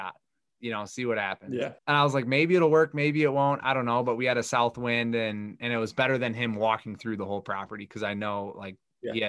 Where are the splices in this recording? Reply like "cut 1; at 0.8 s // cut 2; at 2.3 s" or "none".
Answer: cut 1; at 1.8 s